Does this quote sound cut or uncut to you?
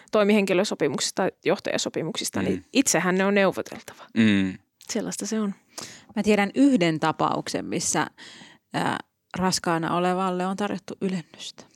uncut